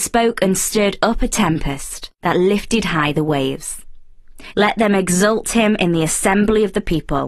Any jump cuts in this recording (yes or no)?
yes